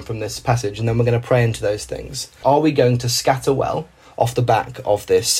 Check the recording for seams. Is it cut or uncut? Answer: cut